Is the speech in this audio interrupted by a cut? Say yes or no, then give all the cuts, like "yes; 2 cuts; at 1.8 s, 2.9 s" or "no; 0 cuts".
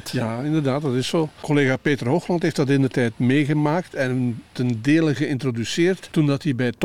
no; 0 cuts